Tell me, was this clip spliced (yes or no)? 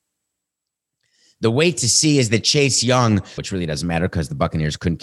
yes